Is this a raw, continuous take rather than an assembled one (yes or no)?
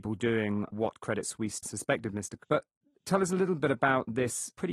no